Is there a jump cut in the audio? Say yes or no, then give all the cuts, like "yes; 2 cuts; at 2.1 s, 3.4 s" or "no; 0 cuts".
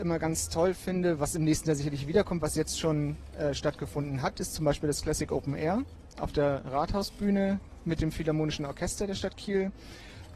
no; 0 cuts